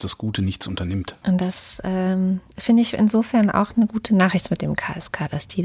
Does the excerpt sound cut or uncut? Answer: cut